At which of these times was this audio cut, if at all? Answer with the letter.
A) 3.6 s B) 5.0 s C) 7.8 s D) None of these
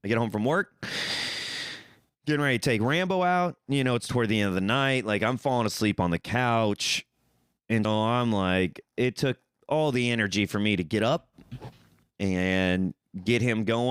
C